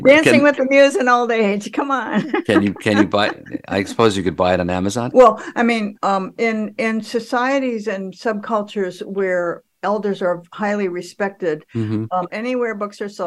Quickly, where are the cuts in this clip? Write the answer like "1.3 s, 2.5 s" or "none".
5.1 s, 12.3 s